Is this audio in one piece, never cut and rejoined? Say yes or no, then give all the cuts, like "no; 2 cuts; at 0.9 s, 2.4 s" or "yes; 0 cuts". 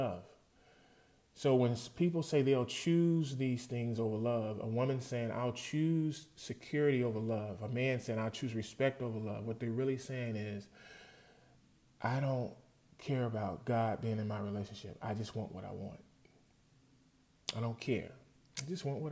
yes; 0 cuts